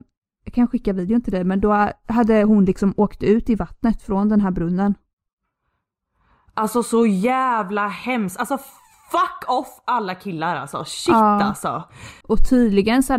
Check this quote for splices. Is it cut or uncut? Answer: cut